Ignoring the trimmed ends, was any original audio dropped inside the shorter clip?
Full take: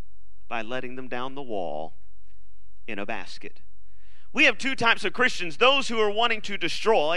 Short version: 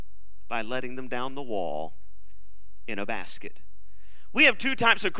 no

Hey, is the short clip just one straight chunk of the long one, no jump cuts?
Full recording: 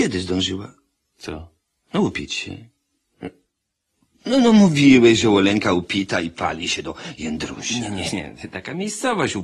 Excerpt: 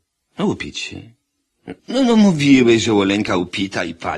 no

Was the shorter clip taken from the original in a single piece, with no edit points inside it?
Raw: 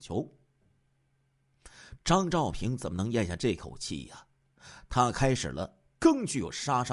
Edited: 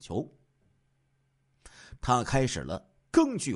no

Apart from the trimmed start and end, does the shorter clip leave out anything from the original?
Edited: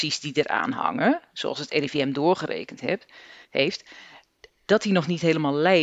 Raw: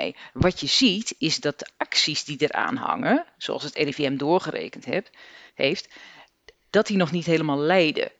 no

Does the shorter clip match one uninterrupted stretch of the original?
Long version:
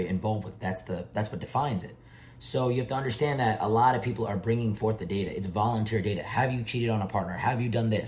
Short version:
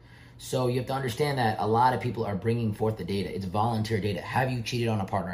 yes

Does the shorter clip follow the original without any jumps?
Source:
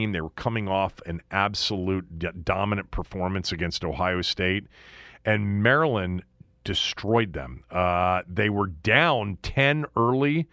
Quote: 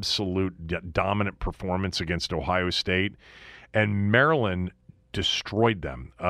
yes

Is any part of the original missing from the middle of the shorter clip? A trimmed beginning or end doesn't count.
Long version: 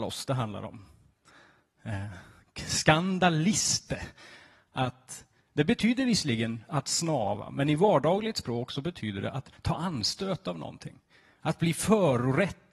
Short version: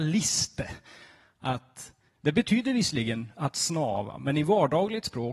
no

